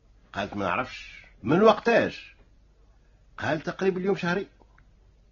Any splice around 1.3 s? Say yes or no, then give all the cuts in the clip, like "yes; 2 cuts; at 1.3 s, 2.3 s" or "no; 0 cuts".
yes; 1 cut; at 1.3 s